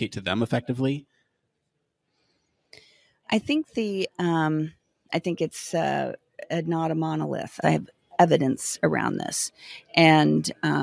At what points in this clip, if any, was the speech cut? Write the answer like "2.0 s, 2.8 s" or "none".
5.1 s, 7.6 s